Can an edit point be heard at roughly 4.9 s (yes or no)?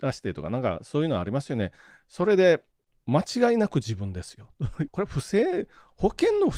yes